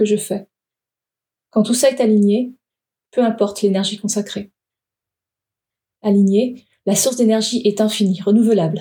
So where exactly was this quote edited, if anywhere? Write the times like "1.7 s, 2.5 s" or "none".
none